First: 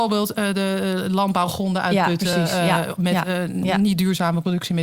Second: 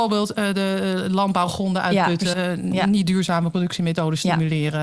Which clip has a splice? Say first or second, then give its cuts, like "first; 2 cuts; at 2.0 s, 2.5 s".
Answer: second; 1 cut; at 2.3 s